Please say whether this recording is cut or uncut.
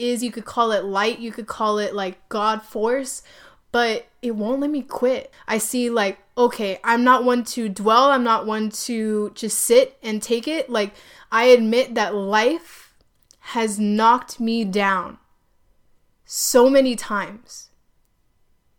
cut